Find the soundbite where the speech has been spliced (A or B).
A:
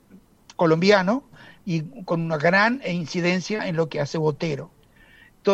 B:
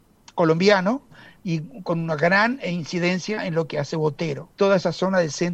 B